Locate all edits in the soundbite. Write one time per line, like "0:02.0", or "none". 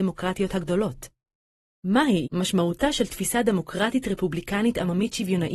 0:02.2